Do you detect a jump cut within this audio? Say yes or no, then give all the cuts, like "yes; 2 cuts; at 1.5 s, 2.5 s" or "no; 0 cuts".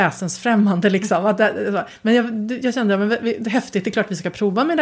no; 0 cuts